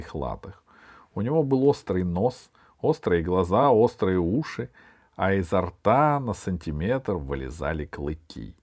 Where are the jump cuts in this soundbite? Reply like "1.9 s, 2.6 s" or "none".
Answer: none